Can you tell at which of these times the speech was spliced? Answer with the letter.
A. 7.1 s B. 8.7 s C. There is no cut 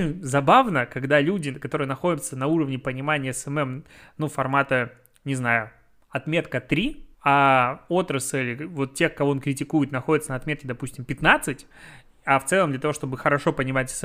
A